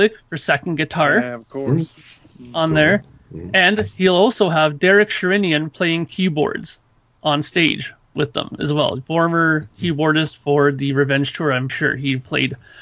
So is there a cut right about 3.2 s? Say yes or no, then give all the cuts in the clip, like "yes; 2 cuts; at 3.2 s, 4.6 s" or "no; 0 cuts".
no; 1 cut; at 11.7 s